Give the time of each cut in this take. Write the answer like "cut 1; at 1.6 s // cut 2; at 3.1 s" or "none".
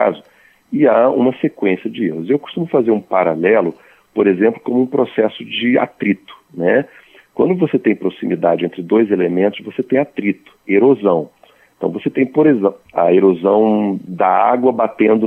cut 1; at 10.6 s // cut 2; at 12.8 s